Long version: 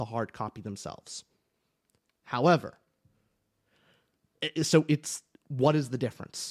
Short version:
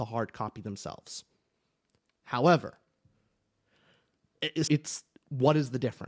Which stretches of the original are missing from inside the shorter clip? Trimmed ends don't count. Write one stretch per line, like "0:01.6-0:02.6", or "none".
0:04.7-0:04.9